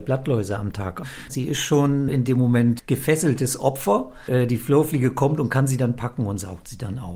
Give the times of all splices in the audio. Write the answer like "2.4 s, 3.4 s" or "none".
1.3 s